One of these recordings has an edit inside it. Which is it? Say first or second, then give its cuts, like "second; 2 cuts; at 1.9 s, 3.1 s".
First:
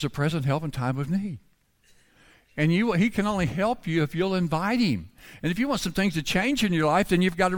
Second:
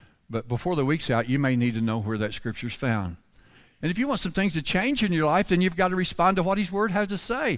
second; 1 cut; at 3.8 s